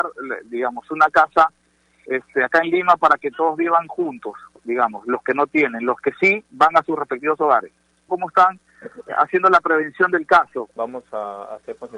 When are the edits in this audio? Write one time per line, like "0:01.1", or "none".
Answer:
0:08.1
0:10.7